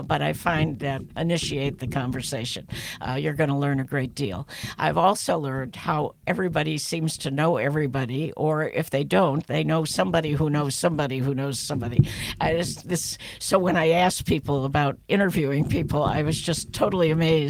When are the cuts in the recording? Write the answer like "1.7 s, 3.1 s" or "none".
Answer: 1.1 s